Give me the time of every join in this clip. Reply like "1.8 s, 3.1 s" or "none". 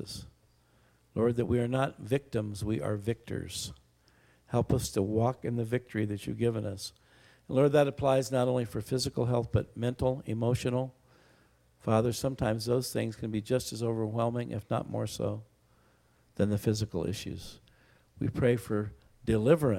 none